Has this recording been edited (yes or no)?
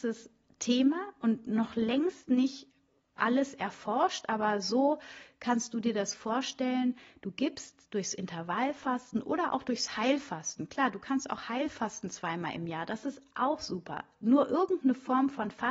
no